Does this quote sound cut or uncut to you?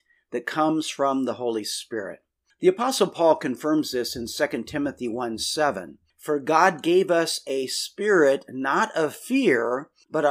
uncut